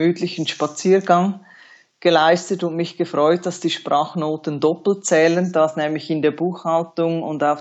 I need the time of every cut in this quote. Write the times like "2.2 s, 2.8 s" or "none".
none